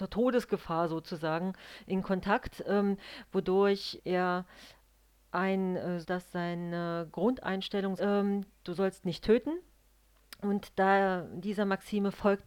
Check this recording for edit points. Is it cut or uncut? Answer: cut